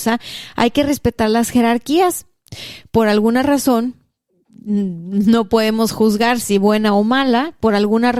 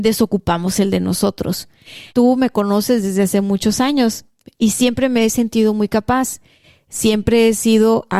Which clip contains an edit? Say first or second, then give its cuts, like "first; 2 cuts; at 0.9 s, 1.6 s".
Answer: second; 1 cut; at 2.1 s